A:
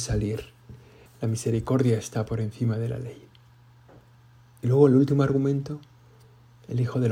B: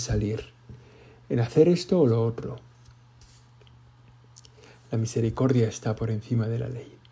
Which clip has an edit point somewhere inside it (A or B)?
A